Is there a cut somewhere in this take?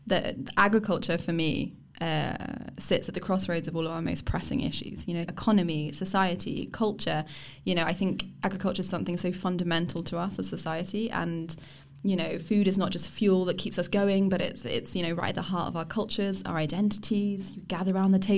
yes; 1 cut; at 5.2 s

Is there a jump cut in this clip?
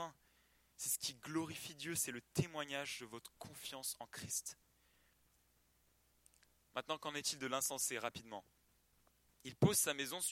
no; 0 cuts

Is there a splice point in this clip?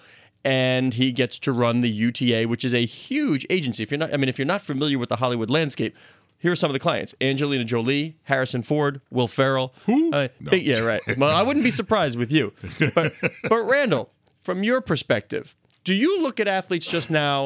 no; 0 cuts

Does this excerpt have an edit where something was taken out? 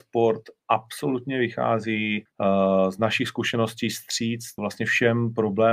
yes; 2 cuts; at 2.3 s, 4.6 s

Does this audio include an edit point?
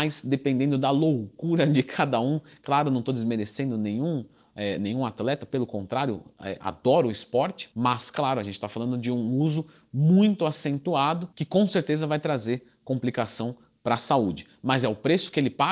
no; 0 cuts

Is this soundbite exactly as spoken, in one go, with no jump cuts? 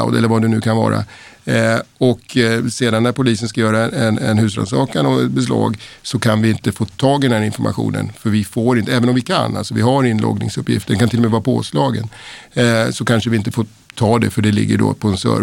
yes; 0 cuts

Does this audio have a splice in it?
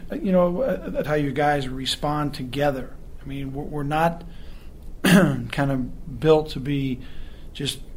yes; 1 cut; at 1.0 s

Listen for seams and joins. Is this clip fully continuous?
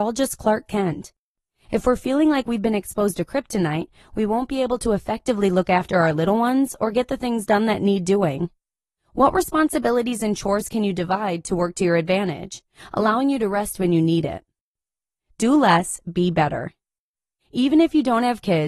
no; 2 cuts; at 9.0 s, 17.4 s

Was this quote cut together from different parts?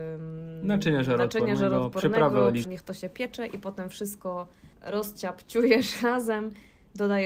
yes; 2 cuts; at 2.6 s, 4.7 s

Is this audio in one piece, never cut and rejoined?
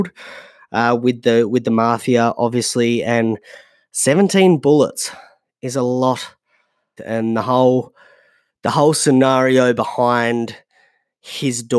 no; 1 cut; at 7.0 s

